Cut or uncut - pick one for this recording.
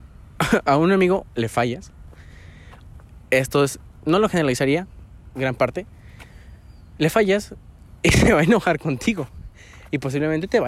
uncut